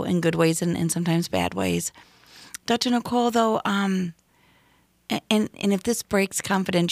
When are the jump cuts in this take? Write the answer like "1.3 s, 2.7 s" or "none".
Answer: none

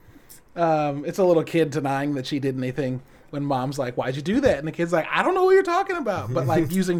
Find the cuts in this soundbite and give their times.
none

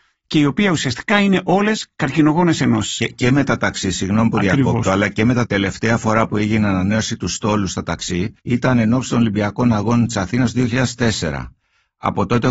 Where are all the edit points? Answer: 5.5 s, 8.4 s

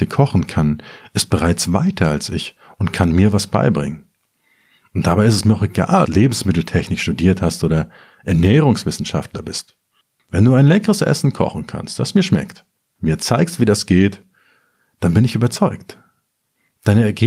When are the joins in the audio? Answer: 6.0 s

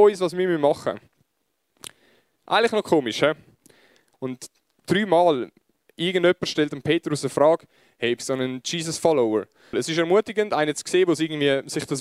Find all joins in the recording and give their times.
4.1 s, 8.2 s, 9.7 s

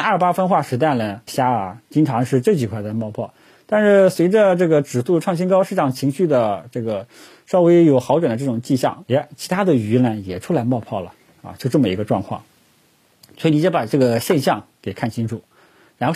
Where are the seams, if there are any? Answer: 1.3 s, 9.0 s

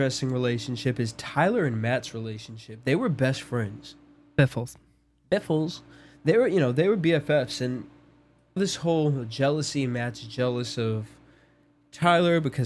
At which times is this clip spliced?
8.6 s

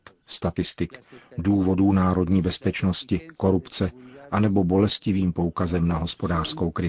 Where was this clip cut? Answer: none

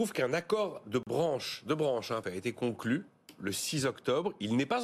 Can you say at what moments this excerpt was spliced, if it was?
2.2 s

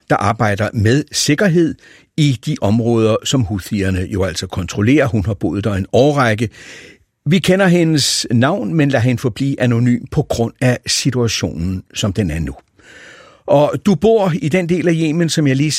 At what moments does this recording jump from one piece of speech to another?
none

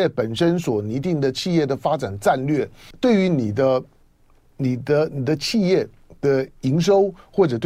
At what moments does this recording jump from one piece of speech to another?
2.9 s

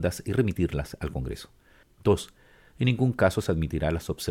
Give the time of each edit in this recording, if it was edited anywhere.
1.8 s

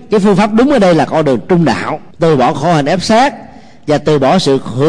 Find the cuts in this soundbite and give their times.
2.1 s

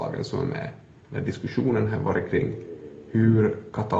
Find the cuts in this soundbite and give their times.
1.0 s

